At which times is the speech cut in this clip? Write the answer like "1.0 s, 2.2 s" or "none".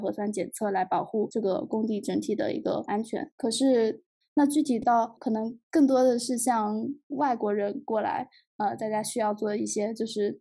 4.2 s, 5.6 s

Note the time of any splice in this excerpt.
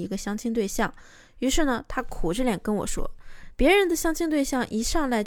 3.5 s

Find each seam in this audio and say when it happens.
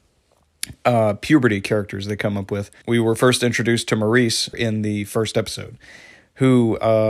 2.8 s, 4.5 s

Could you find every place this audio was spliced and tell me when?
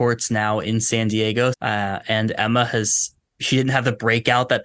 1.5 s, 3.2 s

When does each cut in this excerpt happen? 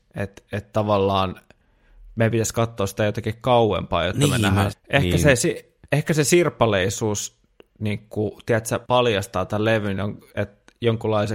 4.7 s, 8.8 s

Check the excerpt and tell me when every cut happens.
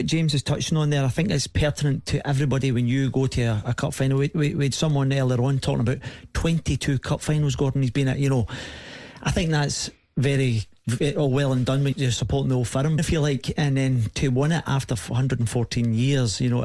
11.9 s, 13.0 s

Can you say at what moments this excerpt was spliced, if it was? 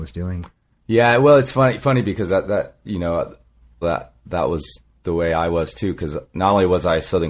3.8 s

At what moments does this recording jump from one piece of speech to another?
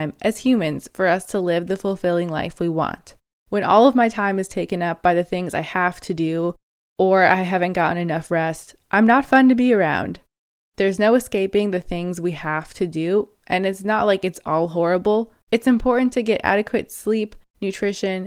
3.3 s, 15.4 s

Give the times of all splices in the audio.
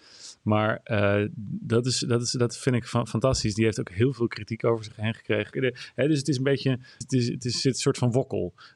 5.5 s, 7.0 s

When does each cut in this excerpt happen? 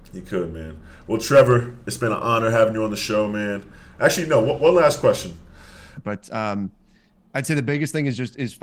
6.0 s

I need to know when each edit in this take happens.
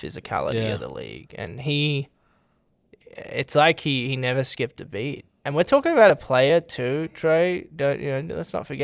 none

